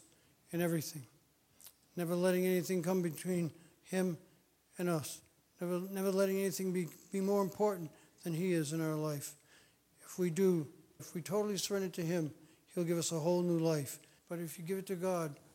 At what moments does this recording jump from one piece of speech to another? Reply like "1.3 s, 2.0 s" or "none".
11.0 s, 14.2 s